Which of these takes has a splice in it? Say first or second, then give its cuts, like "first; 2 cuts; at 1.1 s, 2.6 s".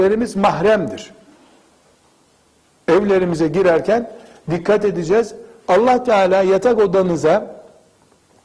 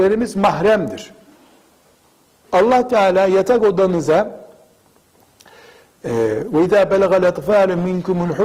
second; 1 cut; at 2.4 s